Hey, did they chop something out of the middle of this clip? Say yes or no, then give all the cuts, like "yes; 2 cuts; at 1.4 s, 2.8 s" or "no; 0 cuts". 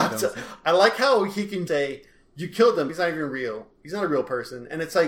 yes; 2 cuts; at 1.7 s, 2.9 s